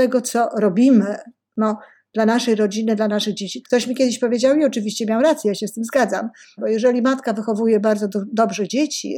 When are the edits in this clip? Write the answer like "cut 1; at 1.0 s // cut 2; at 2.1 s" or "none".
cut 1; at 3.6 s // cut 2; at 6.6 s